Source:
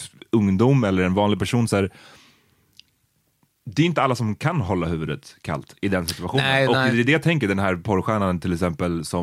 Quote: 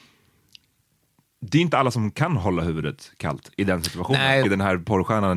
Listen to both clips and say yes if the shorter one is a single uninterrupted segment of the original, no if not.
no